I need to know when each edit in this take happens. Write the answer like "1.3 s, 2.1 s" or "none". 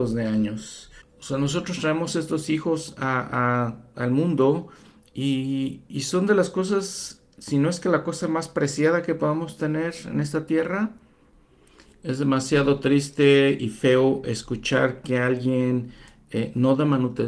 1.0 s